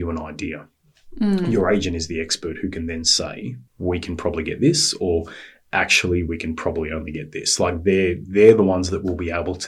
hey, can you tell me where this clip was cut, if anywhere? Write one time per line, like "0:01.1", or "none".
0:03.7